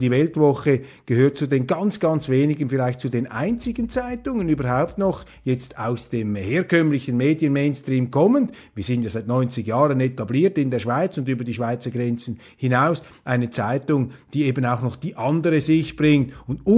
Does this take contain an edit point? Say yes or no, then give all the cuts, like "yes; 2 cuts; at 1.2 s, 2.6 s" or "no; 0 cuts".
no; 0 cuts